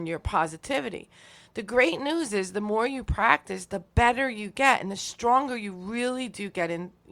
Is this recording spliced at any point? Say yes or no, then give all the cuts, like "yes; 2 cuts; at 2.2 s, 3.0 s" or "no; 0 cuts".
no; 0 cuts